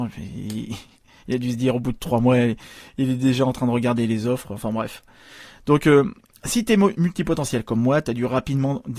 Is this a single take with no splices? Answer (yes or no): yes